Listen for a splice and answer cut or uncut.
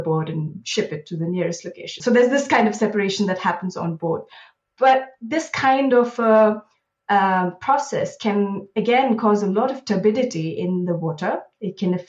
cut